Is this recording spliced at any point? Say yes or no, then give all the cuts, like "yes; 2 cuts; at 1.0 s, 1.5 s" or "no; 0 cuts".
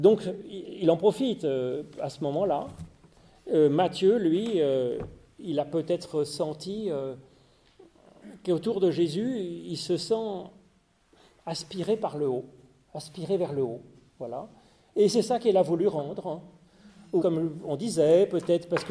yes; 1 cut; at 17.2 s